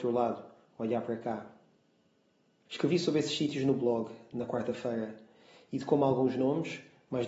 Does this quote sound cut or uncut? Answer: cut